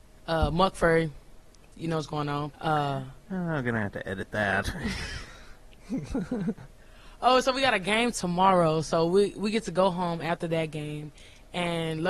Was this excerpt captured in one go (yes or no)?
no